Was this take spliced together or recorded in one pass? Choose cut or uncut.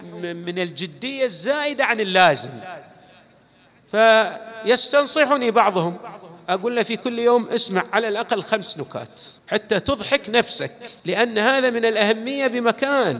cut